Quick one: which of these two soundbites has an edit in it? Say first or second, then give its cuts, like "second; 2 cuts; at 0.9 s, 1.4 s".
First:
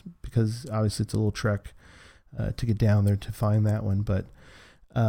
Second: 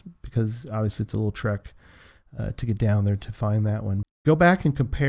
second; 1 cut; at 4.0 s